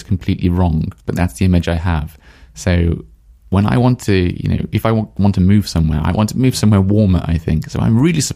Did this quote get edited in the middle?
yes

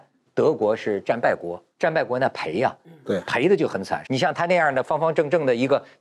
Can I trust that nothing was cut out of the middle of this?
no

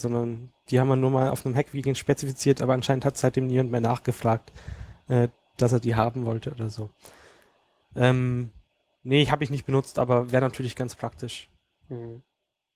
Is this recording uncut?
yes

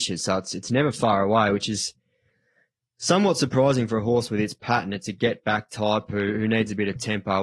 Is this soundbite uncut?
yes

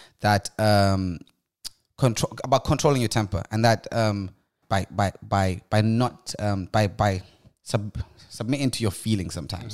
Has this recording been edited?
yes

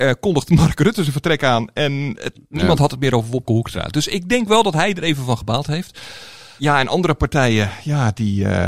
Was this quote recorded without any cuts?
yes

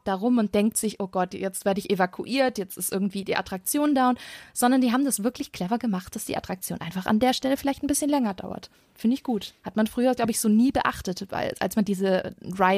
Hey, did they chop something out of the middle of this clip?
no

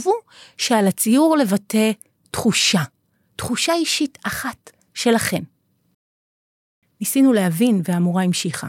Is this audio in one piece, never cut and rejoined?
yes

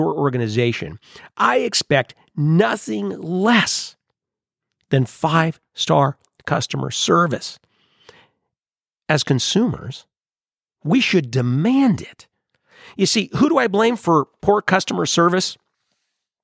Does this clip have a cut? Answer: no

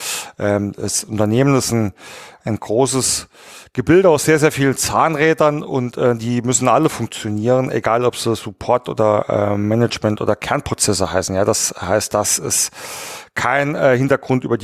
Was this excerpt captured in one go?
yes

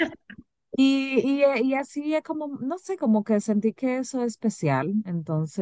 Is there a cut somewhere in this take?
no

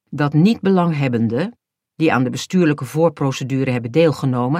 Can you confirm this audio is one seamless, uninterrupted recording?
yes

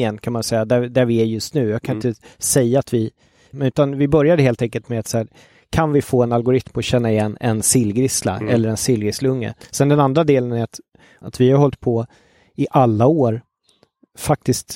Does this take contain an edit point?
yes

